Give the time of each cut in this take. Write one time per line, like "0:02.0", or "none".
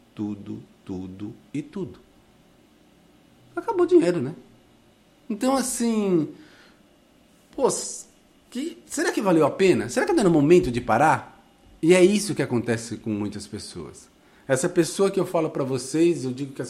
none